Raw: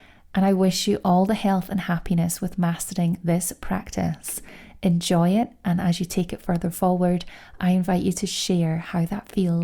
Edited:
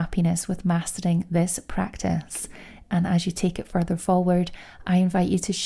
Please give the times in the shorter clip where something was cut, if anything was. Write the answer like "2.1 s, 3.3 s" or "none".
2.8 s